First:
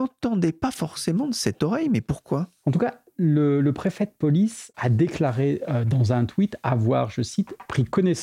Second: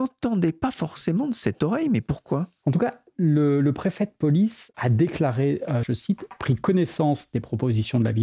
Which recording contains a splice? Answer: second; 1 cut; at 5.8 s

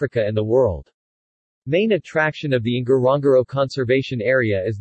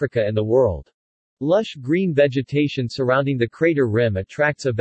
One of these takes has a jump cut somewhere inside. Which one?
second; 1 cut; at 1.2 s

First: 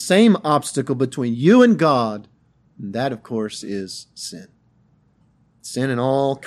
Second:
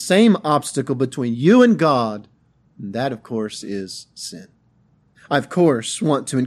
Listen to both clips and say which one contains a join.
second; 1 cut; at 5.1 s

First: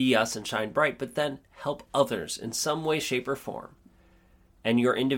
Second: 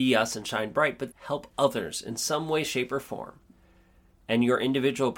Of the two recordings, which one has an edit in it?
second; 1 cut; at 1.1 s

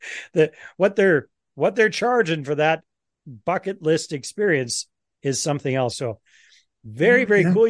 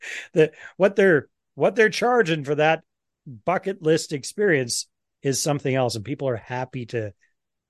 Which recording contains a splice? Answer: first; 1 cut; at 5.9 s

